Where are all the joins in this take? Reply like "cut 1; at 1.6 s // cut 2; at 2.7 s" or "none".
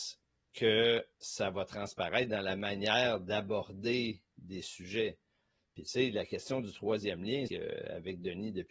cut 1; at 7.5 s